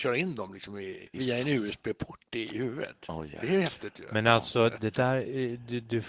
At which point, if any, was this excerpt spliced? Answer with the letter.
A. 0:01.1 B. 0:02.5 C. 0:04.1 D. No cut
A